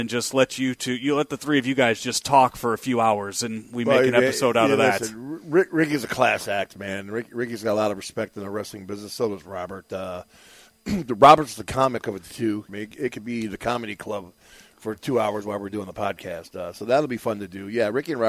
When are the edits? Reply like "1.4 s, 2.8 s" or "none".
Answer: 12.7 s